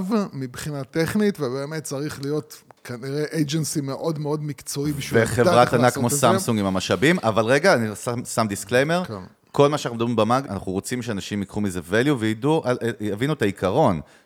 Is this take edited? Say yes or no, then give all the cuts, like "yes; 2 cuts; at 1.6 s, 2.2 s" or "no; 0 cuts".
yes; 1 cut; at 10.5 s